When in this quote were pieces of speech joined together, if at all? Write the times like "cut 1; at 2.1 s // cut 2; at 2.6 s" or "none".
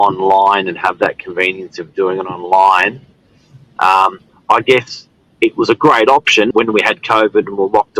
cut 1; at 3.8 s // cut 2; at 6.5 s